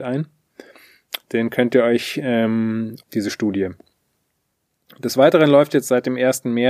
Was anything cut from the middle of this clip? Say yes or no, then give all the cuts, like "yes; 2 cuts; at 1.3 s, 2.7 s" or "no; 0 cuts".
yes; 2 cuts; at 1.2 s, 3.0 s